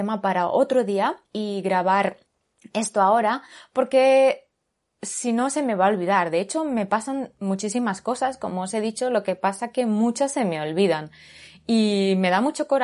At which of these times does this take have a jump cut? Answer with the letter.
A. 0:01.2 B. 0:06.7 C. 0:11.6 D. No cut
A